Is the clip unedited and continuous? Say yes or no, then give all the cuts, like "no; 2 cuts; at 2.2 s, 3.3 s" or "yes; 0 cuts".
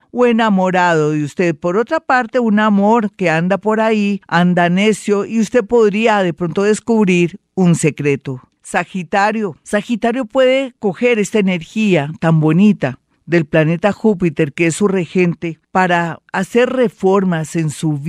yes; 0 cuts